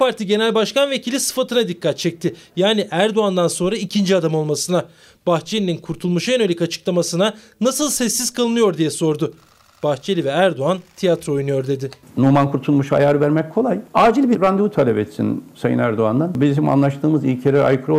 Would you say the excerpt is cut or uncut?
uncut